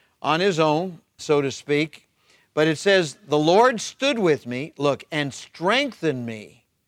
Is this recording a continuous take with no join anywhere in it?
no; 1 cut; at 1.2 s

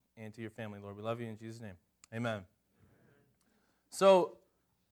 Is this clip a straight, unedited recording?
yes; 0 cuts

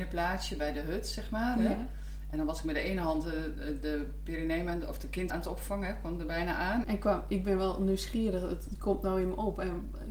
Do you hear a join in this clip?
yes; 2 cuts; at 5.3 s, 6.8 s

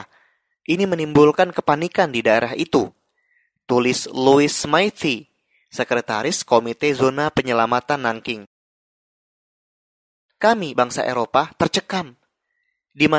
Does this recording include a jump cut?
no; 0 cuts

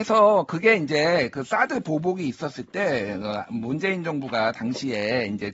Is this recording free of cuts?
yes; 0 cuts

